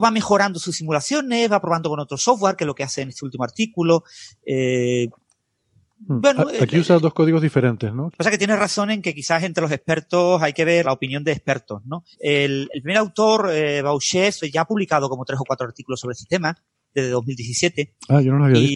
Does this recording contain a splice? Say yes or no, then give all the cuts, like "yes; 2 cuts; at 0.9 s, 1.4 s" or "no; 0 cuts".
yes; 3 cuts; at 8.1 s, 10.8 s, 12.1 s